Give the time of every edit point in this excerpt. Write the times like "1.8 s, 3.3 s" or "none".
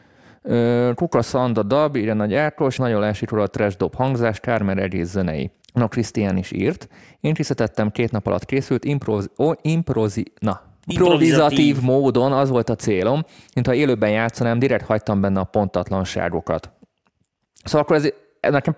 2.8 s, 5.6 s, 10.9 s